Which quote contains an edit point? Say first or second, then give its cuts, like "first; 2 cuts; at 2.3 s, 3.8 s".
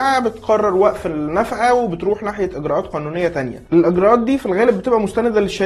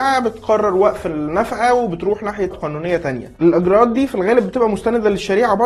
second; 1 cut; at 2.5 s